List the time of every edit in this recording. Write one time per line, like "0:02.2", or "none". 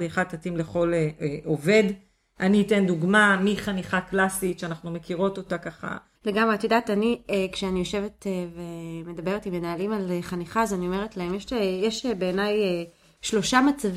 0:06.1

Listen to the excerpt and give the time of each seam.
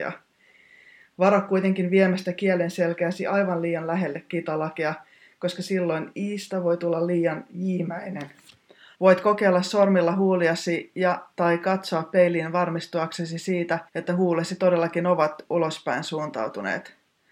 0:08.9
0:13.9

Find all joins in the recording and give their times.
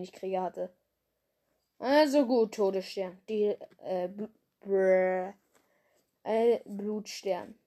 none

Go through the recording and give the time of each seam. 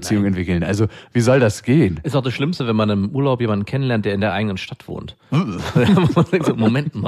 none

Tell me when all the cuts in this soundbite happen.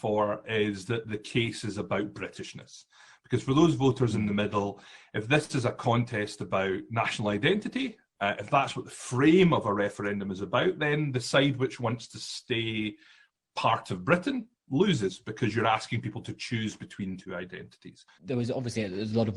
0:18.1

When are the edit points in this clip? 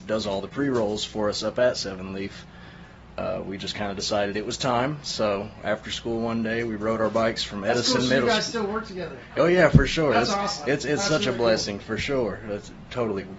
none

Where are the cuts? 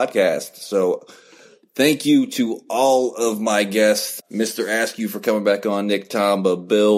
0:04.2

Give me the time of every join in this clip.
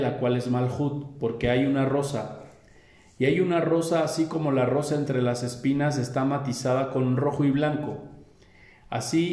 none

